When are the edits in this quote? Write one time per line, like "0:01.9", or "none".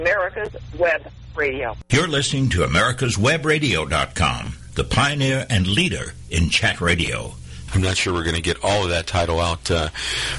0:07.7